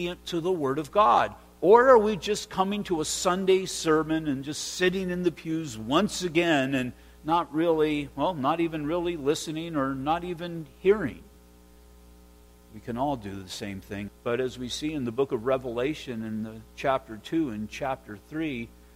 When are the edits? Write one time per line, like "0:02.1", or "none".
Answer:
0:14.1